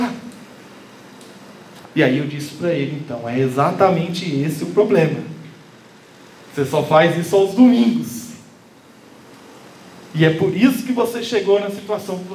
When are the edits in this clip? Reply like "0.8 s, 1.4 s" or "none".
1.8 s